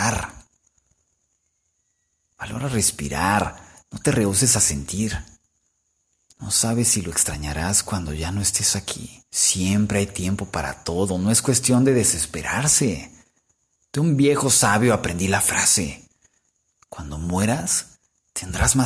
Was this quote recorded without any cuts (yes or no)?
no